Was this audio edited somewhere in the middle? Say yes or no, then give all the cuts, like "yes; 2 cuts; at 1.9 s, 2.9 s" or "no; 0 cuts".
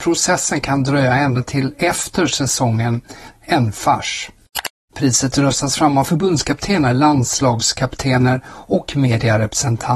yes; 2 cuts; at 3.3 s, 4.9 s